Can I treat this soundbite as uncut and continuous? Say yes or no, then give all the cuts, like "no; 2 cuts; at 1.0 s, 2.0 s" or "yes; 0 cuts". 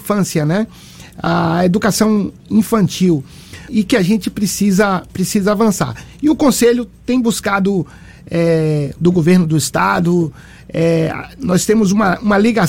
no; 2 cuts; at 3.7 s, 9.0 s